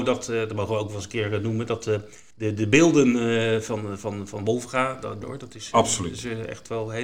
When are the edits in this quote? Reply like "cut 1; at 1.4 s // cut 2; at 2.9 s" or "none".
cut 1; at 5.2 s